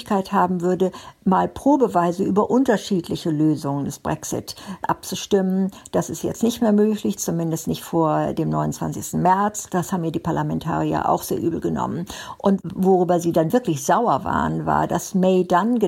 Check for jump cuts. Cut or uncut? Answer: uncut